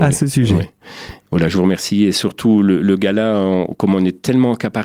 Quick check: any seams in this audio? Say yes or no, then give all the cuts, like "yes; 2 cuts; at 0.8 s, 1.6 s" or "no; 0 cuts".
no; 0 cuts